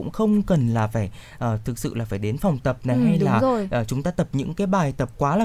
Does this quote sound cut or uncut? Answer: uncut